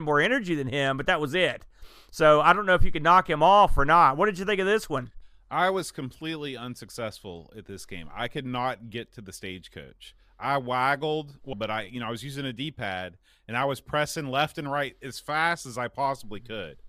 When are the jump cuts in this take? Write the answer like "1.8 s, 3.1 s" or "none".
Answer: 11.5 s